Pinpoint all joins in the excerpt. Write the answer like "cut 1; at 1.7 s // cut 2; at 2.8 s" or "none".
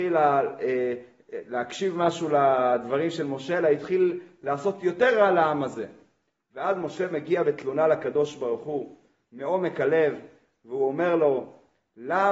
none